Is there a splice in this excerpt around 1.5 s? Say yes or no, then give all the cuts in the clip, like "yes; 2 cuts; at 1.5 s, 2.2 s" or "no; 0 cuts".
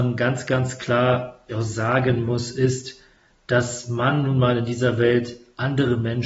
yes; 1 cut; at 1.5 s